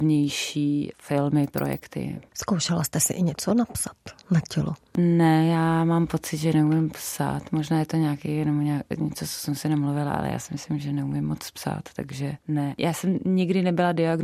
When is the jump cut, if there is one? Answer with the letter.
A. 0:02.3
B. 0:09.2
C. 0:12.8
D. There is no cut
D